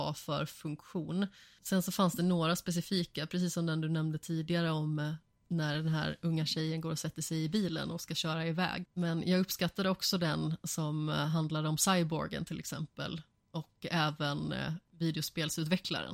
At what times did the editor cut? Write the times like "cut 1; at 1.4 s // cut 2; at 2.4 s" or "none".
cut 1; at 8.8 s